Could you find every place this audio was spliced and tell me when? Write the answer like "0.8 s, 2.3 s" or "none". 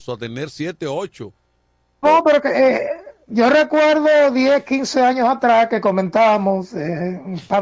2.0 s